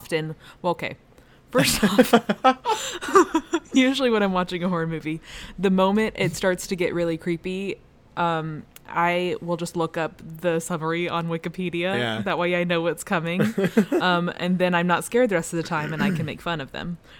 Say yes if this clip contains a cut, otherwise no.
no